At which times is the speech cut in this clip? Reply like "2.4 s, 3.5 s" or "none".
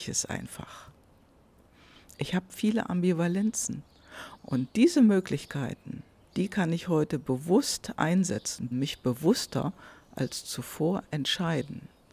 4.4 s, 8.7 s